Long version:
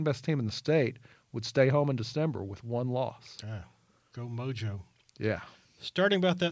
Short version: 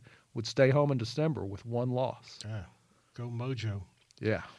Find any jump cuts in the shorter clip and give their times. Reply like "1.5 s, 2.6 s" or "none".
none

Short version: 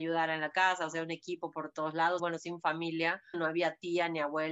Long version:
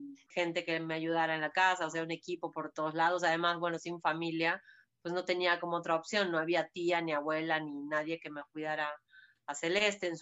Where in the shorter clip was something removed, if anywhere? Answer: 2.2 s, 3.3 s

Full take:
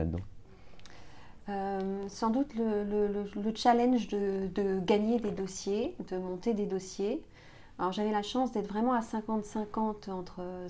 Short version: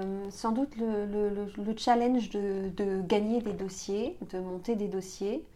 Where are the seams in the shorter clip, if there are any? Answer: none

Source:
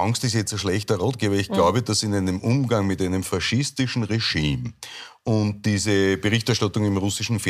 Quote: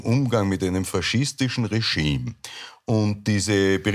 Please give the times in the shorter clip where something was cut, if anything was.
none

